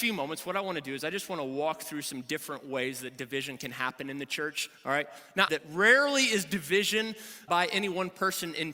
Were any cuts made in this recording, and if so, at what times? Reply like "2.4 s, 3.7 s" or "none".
5.5 s, 7.5 s